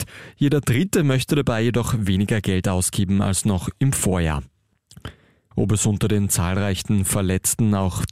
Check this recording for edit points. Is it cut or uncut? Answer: cut